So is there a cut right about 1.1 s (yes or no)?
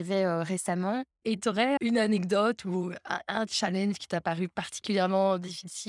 yes